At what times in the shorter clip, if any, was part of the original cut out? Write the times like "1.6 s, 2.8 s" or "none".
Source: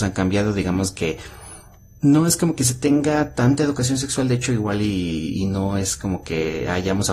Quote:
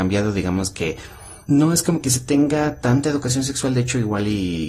1.4 s